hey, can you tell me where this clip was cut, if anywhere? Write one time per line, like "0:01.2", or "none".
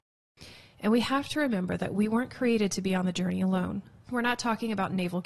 0:04.1